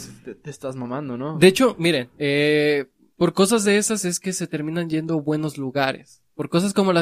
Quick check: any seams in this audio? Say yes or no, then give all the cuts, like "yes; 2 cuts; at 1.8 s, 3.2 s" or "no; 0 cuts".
no; 0 cuts